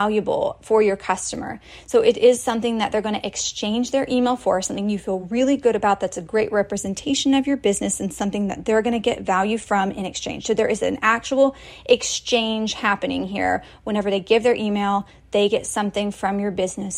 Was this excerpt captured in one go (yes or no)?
yes